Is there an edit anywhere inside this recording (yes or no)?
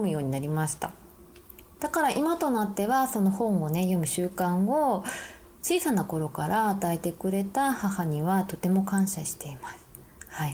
yes